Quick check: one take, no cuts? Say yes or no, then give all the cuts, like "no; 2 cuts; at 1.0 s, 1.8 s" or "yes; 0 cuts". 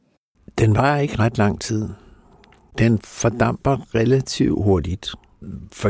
yes; 0 cuts